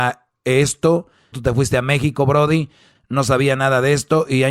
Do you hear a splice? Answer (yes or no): yes